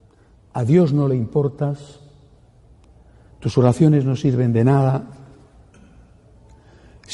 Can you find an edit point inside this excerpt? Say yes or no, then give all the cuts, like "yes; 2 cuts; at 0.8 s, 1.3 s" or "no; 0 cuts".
no; 0 cuts